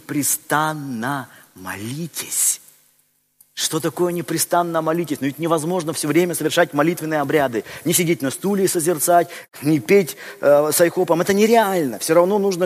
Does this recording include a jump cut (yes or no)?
no